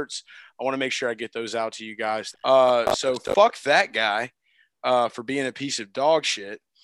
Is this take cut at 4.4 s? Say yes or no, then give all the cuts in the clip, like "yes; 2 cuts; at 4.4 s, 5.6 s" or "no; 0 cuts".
no; 1 cut; at 2.3 s